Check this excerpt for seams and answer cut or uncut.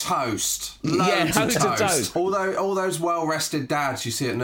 cut